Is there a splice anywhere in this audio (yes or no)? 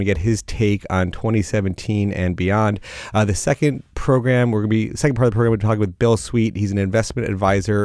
no